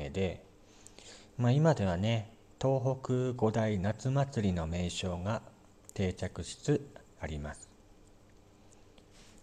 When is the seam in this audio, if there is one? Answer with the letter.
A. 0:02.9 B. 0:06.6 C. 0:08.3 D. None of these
B